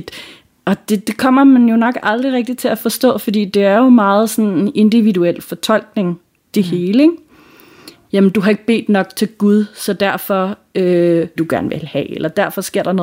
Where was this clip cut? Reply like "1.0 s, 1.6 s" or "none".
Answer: 8.1 s, 11.4 s